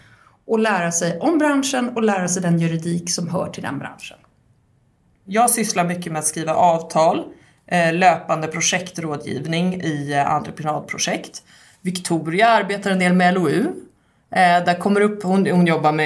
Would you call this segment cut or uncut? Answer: uncut